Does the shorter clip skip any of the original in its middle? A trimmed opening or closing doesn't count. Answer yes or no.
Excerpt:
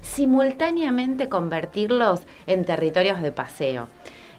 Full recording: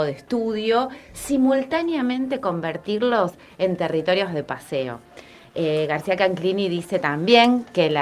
no